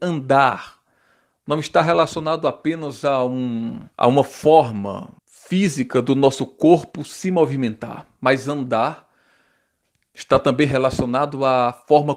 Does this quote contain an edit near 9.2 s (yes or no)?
no